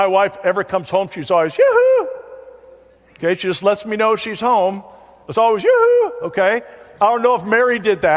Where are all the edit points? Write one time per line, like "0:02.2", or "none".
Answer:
none